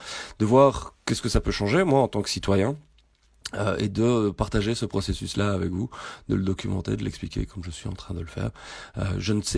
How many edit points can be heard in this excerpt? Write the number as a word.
zero